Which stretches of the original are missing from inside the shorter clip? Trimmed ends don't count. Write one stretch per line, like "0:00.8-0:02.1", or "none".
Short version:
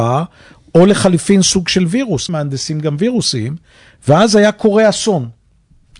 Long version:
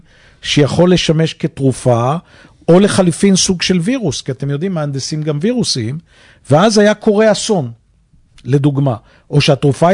0:04.2-0:04.7